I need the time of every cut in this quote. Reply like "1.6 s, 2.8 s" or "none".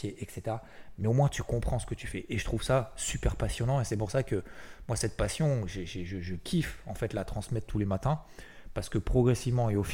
none